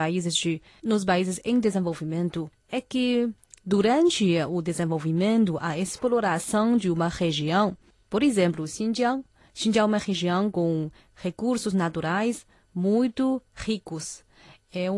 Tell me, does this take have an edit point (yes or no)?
no